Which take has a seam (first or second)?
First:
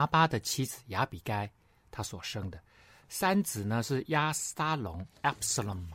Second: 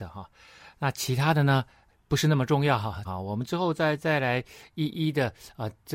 second